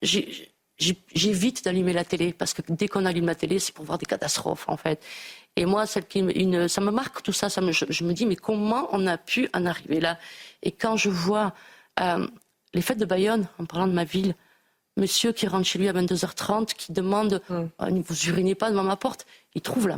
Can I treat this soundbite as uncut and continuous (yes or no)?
yes